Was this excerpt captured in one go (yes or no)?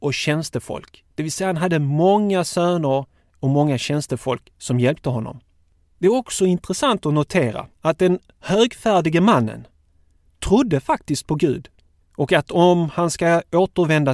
no